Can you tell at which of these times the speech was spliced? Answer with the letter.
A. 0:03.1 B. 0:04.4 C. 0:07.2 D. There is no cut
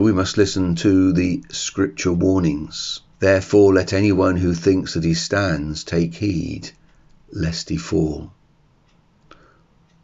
A